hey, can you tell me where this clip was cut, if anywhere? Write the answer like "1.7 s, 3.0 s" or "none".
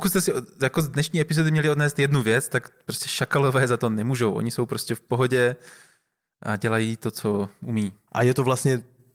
8.1 s